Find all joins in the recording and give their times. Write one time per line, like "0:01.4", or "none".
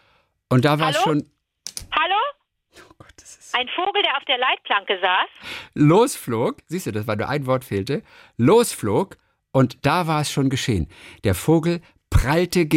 none